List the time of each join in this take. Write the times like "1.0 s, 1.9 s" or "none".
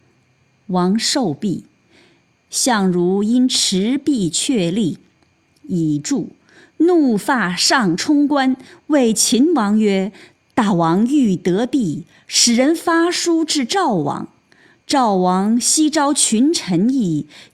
none